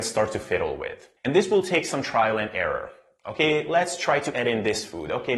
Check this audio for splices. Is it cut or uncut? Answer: cut